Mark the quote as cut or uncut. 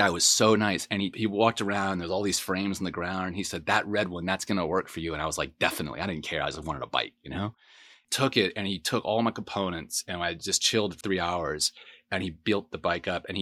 cut